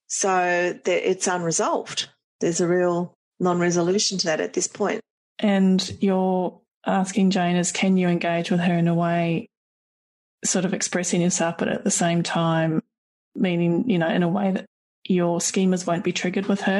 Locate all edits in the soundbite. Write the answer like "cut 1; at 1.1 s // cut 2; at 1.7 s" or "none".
none